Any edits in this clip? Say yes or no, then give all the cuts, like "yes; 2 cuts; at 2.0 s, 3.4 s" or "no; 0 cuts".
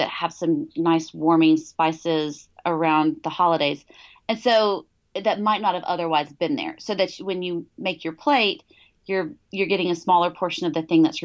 no; 0 cuts